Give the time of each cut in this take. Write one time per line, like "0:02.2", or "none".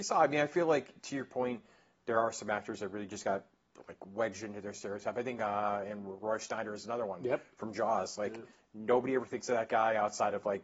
none